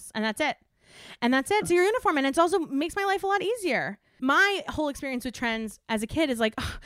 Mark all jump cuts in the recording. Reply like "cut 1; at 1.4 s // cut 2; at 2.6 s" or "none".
cut 1; at 1.6 s // cut 2; at 4.2 s